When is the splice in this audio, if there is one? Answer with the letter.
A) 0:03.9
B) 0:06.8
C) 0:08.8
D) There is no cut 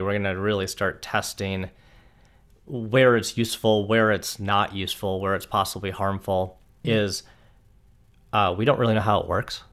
B